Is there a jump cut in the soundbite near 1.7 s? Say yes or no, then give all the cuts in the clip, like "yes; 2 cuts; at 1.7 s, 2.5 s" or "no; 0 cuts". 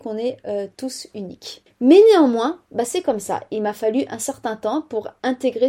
yes; 1 cut; at 1.7 s